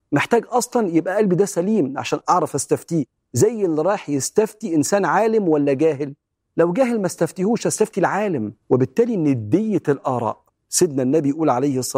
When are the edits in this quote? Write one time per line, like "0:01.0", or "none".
0:02.2
0:08.6